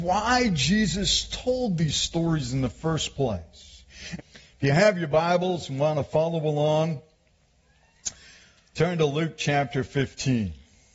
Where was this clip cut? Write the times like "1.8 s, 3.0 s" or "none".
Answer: 4.2 s